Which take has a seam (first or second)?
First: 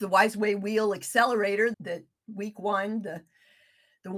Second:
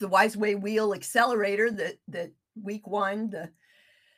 first